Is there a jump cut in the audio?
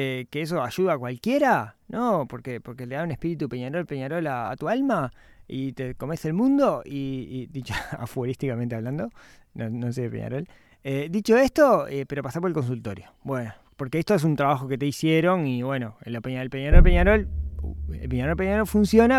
no; 0 cuts

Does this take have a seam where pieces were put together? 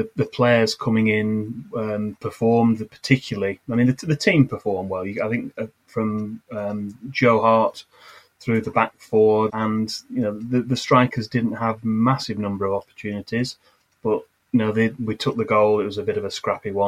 yes; 1 cut; at 9.5 s

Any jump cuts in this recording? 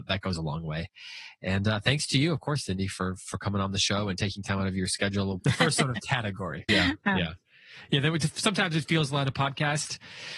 yes; 2 cuts; at 5.4 s, 6.7 s

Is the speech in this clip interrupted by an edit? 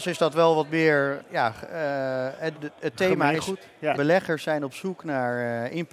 yes; 2 cuts; at 2.5 s, 3.9 s

